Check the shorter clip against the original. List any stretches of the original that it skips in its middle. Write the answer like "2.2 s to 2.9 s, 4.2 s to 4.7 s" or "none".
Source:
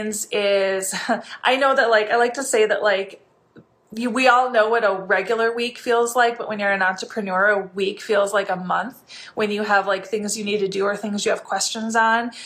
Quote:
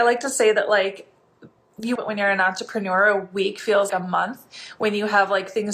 4.1 s to 6.4 s, 8.3 s to 8.5 s